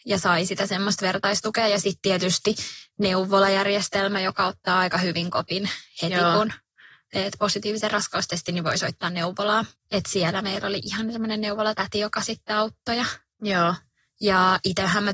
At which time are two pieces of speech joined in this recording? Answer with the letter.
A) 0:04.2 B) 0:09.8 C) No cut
B